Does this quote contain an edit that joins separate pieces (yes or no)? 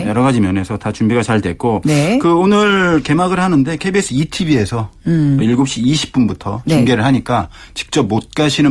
no